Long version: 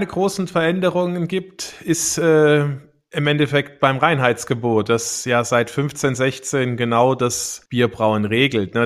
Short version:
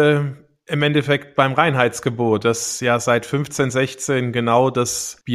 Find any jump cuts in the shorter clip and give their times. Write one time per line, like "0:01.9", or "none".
none